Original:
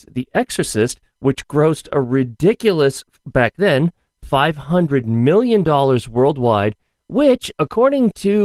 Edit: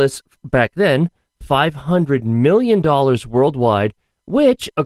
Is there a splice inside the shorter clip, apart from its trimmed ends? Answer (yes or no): no